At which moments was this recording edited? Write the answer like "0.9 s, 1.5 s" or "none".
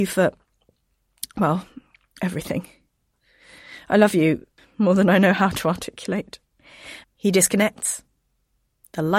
4.6 s, 7.0 s